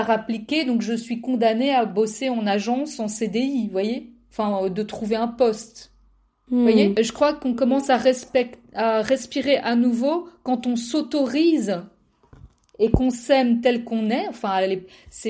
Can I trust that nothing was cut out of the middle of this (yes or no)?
yes